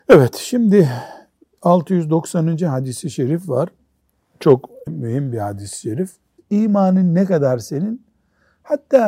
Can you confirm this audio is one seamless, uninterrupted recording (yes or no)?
no